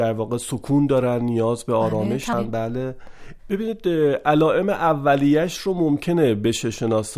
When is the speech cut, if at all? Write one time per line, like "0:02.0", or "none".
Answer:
0:02.3
0:03.4